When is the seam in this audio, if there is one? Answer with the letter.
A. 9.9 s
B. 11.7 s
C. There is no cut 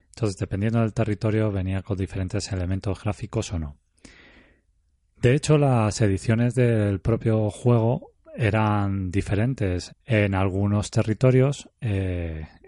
A